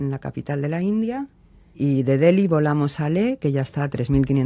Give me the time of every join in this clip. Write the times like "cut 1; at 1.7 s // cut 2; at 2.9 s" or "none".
cut 1; at 1.7 s // cut 2; at 3.4 s